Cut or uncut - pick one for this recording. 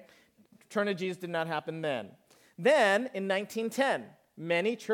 uncut